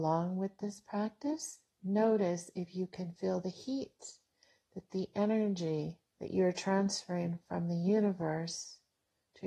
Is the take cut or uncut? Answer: cut